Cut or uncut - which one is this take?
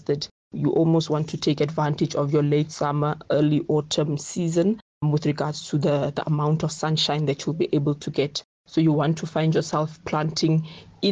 uncut